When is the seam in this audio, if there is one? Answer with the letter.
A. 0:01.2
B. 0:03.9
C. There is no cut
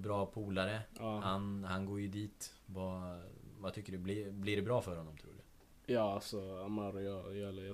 C